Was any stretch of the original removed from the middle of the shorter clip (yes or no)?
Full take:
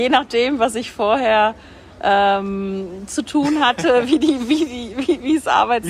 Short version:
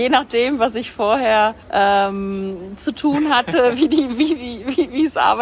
yes